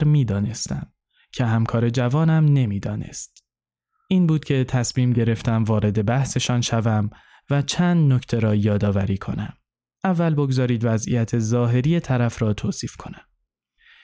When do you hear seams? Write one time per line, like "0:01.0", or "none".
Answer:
none

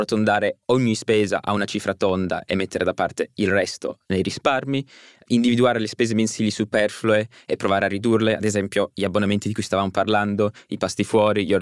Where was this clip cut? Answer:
none

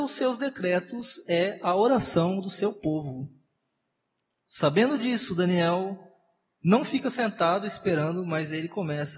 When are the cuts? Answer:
none

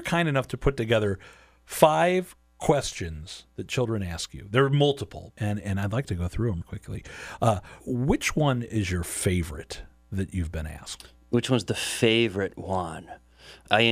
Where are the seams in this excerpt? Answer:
0:05.3
0:07.8

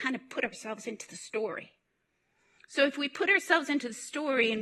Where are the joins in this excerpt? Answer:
none

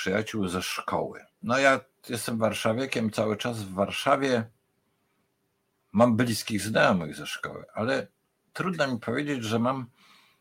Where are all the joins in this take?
0:01.3

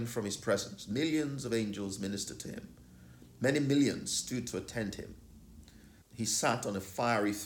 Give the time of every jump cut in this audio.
0:06.0

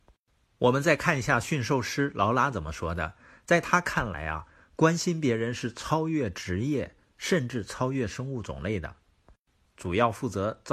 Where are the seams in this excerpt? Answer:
0:09.7

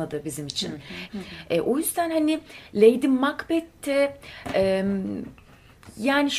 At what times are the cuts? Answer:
0:01.1

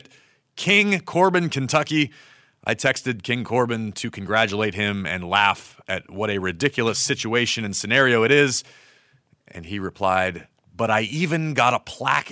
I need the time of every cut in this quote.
none

